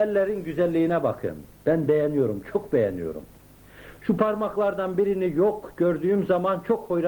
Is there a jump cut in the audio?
no; 0 cuts

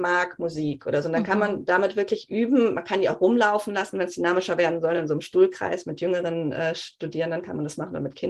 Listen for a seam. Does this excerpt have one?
no; 0 cuts

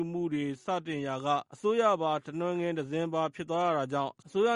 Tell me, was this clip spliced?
yes; 1 cut; at 1.5 s

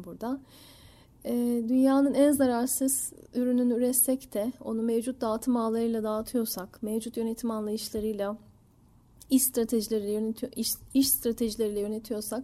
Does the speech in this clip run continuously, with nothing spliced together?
yes; 0 cuts

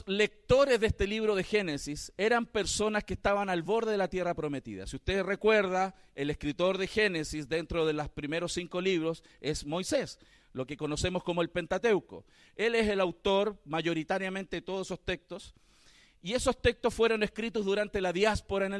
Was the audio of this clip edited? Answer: no; 0 cuts

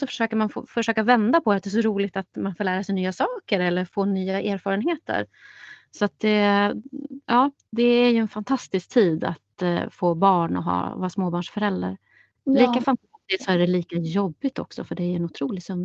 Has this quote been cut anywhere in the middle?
no; 0 cuts

